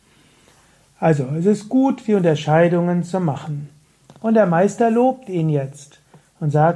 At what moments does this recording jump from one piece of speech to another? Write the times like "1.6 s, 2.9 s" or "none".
none